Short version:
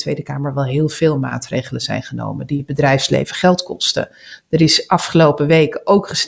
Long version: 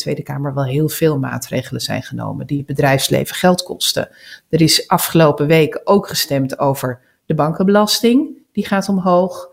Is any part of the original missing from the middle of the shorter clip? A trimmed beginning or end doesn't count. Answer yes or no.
no